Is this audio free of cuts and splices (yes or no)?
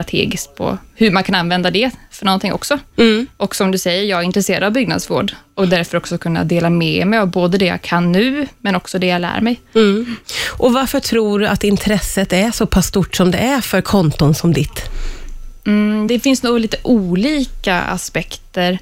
no